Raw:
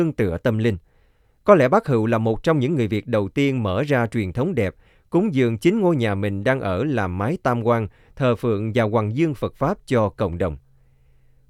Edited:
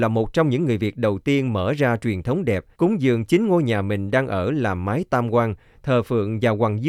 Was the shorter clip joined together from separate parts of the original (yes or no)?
yes